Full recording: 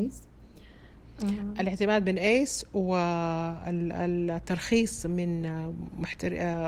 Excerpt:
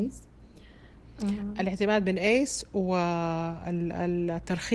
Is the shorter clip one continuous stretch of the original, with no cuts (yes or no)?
yes